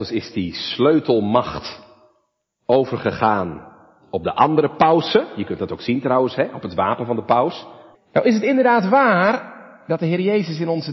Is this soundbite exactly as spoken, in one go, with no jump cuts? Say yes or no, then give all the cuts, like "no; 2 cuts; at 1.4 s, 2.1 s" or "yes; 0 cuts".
no; 1 cut; at 7.9 s